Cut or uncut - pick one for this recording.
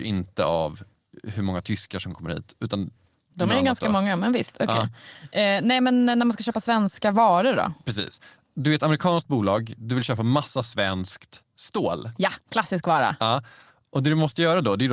uncut